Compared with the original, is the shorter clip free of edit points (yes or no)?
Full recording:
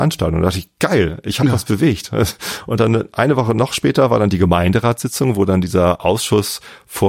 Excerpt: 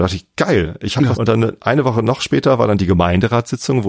no